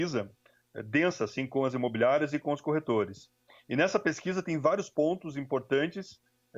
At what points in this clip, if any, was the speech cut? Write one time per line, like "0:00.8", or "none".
none